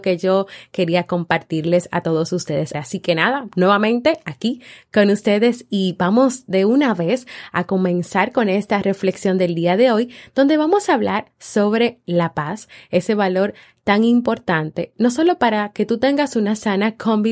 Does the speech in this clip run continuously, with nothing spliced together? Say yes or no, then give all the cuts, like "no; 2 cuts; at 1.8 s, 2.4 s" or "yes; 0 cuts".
no; 1 cut; at 2.7 s